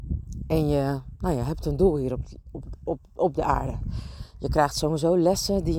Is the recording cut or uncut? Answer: uncut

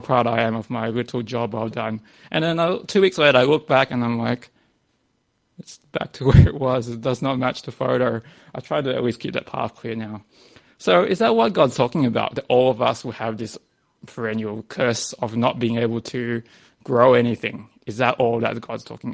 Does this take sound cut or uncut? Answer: uncut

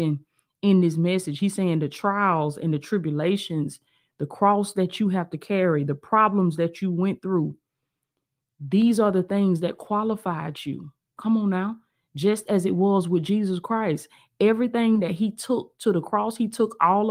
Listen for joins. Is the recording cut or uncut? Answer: uncut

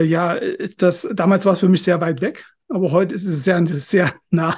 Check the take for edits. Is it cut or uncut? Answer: uncut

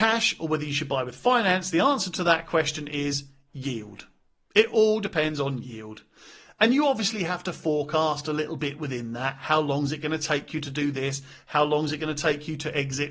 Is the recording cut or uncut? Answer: uncut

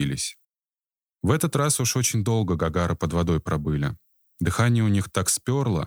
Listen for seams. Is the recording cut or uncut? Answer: uncut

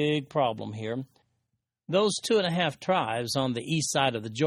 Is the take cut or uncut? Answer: uncut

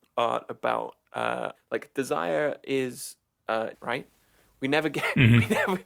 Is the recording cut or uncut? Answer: cut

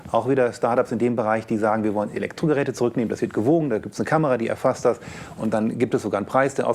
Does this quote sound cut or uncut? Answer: uncut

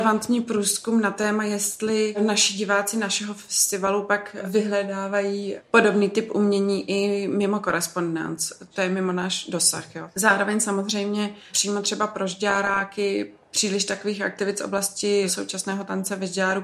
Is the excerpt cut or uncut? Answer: uncut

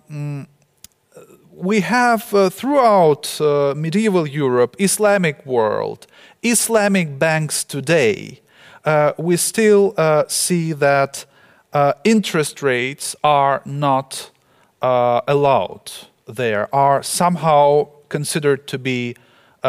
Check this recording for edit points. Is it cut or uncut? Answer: uncut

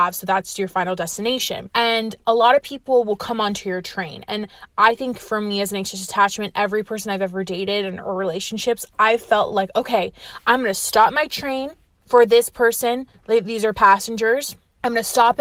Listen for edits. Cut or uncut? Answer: uncut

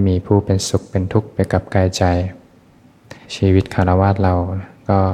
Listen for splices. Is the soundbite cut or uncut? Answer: cut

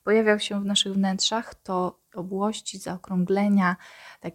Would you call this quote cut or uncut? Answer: cut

